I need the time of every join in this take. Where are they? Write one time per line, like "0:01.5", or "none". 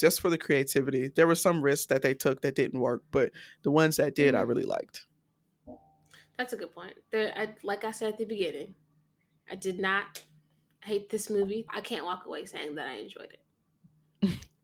0:07.4
0:11.7